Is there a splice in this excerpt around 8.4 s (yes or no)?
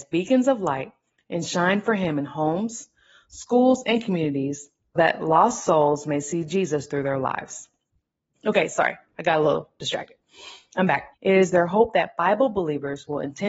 yes